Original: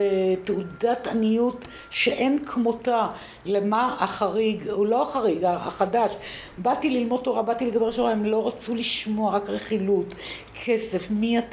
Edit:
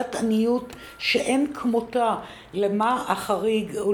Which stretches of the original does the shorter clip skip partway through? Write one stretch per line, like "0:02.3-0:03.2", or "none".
none